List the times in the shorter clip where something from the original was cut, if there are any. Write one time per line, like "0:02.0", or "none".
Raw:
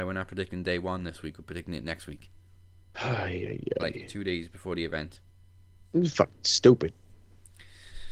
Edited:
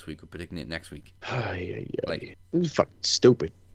0:01.2
0:02.3